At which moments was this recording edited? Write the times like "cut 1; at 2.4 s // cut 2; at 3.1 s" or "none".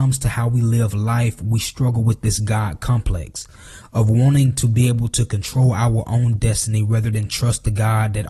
none

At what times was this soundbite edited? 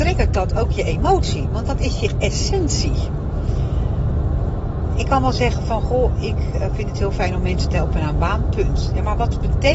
none

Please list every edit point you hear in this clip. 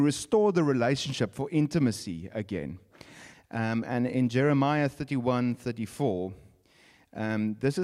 cut 1; at 3.3 s

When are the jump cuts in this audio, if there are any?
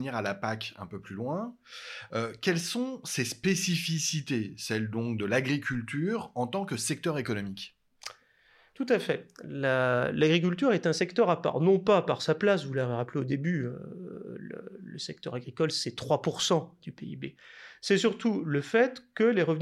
none

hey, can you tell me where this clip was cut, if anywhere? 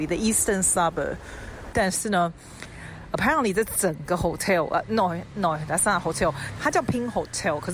cut 1; at 1.7 s // cut 2; at 6.6 s

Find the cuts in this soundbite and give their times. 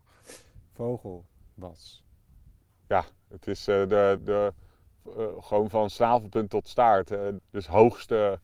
cut 1; at 4.2 s // cut 2; at 7.4 s

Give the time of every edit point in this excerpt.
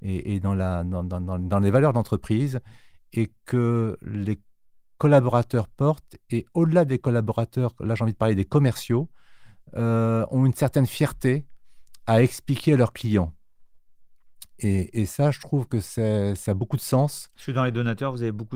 none

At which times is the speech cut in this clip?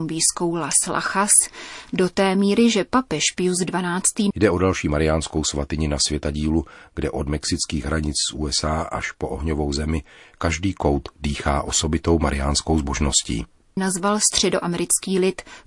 cut 1; at 4.3 s // cut 2; at 13.8 s

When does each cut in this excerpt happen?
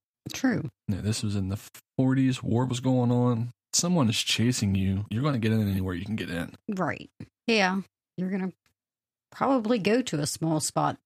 none

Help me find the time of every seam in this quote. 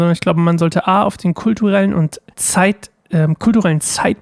cut 1; at 2.3 s

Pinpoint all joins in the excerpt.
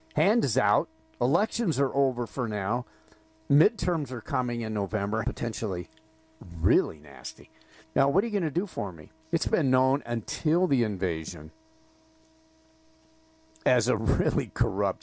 cut 1; at 5.2 s // cut 2; at 7.8 s // cut 3; at 9.2 s

